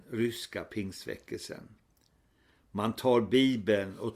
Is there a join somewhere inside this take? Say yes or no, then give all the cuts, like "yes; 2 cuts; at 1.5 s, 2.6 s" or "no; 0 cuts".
no; 0 cuts